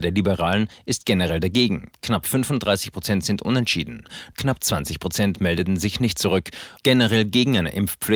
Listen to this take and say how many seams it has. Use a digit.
2